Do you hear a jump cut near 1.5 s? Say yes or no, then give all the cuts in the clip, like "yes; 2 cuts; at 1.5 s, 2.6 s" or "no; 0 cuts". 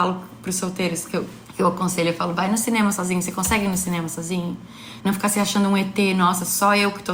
no; 1 cut; at 5.0 s